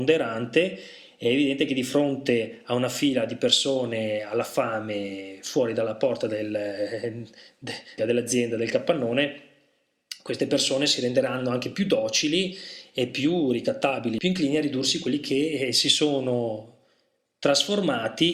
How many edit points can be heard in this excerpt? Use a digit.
1